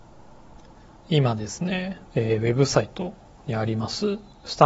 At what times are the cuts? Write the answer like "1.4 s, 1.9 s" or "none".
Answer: 2.1 s